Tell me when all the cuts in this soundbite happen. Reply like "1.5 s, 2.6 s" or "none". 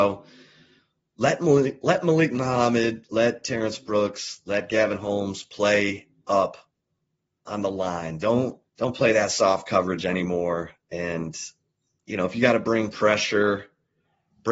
8.7 s